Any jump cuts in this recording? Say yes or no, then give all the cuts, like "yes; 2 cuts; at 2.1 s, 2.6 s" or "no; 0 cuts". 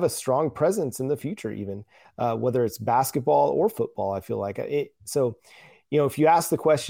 no; 0 cuts